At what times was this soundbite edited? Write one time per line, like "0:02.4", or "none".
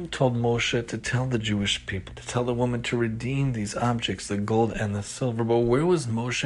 0:02.1
0:04.3